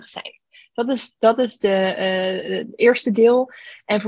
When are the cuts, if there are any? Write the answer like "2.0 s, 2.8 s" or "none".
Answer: none